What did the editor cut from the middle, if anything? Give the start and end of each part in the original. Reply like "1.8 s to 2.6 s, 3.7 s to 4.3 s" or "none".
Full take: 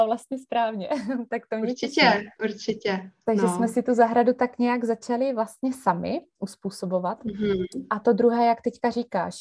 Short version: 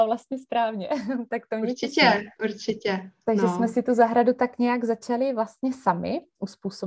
none